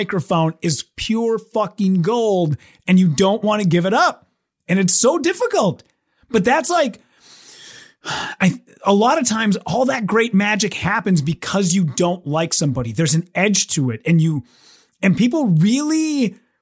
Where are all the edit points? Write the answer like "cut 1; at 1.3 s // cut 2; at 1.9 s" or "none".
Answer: none